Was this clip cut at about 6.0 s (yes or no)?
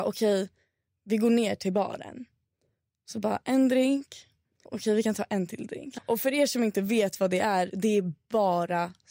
yes